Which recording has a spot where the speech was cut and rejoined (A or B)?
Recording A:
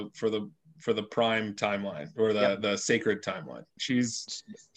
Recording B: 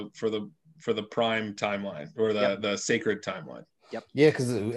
A